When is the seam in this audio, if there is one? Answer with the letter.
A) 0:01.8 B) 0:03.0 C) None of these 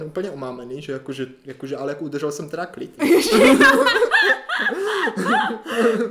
B